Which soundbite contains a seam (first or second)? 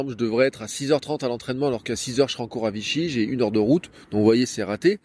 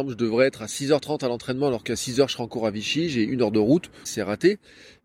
second